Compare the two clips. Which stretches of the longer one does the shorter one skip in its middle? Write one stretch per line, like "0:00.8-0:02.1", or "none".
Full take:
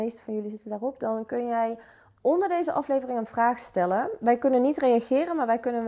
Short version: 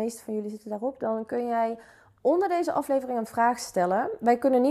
none